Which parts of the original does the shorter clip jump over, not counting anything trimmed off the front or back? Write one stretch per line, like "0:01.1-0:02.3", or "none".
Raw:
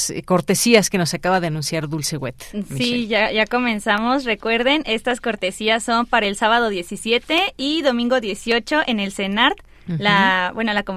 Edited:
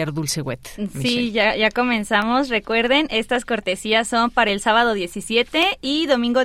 none

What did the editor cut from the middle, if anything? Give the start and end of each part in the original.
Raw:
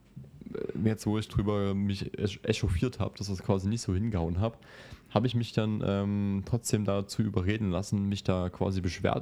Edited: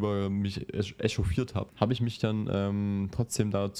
0:03.1-0:05.0

